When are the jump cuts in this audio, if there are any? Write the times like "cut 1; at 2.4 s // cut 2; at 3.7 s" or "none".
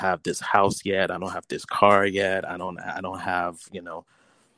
none